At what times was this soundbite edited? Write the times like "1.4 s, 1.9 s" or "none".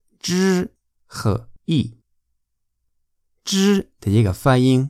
1.6 s